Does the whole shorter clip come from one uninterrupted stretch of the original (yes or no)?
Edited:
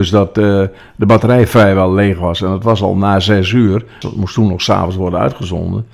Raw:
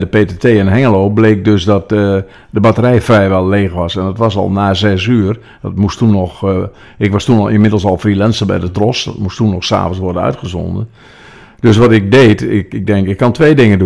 no